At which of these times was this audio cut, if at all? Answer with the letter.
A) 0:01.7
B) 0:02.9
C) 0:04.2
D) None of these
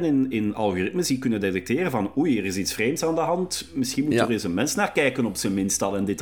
D